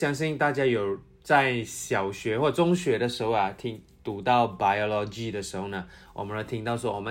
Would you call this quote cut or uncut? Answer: uncut